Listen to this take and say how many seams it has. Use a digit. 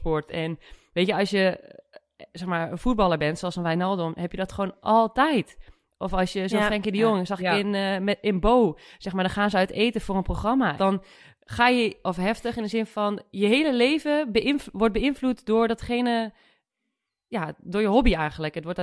1